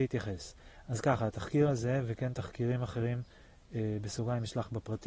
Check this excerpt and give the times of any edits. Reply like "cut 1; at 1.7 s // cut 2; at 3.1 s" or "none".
none